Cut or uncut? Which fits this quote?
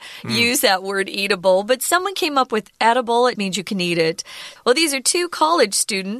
cut